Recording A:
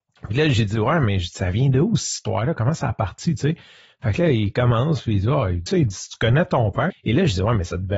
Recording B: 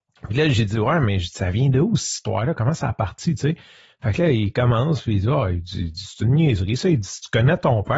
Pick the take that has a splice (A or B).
A